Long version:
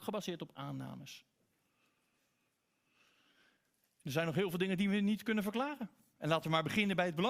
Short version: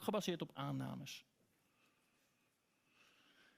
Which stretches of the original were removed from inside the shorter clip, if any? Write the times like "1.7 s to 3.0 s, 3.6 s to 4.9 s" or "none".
none